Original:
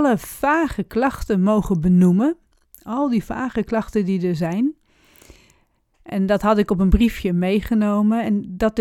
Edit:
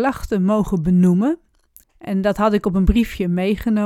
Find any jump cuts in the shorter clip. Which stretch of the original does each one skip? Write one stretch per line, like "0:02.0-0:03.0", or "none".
0:02.8-0:05.9